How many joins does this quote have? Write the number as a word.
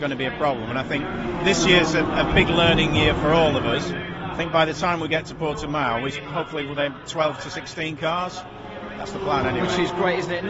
one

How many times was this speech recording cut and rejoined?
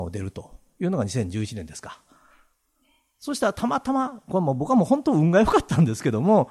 zero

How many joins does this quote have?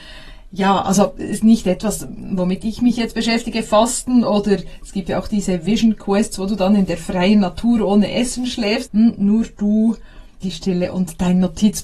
two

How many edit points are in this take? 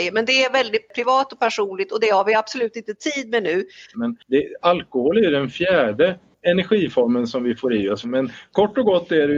two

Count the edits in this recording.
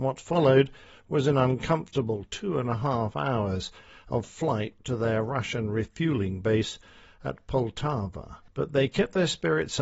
one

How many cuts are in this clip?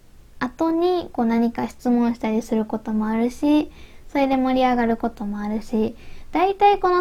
zero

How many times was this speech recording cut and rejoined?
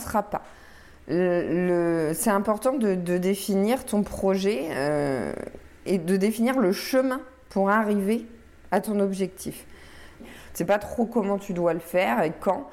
one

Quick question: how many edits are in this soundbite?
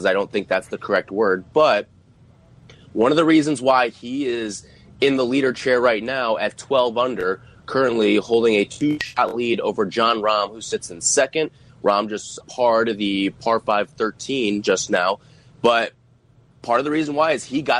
one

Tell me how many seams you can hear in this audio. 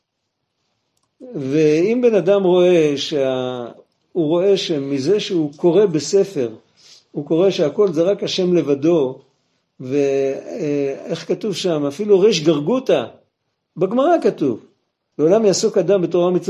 one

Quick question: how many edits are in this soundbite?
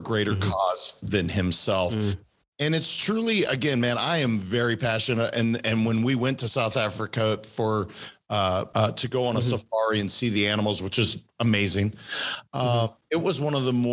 one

